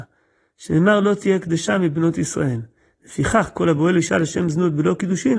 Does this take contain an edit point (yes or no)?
no